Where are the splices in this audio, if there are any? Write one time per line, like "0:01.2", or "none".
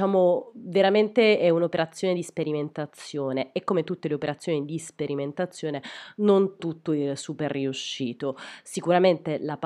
0:06.6